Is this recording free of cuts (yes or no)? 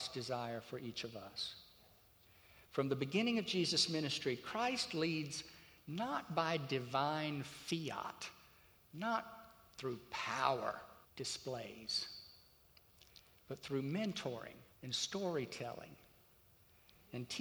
no